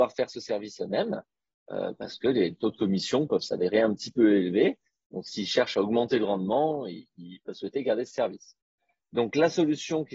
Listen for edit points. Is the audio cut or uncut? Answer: uncut